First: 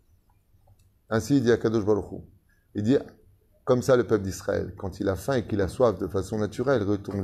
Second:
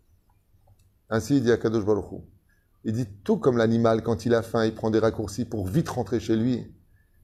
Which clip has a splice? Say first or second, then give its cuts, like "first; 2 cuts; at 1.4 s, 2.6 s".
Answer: first; 1 cut; at 2.7 s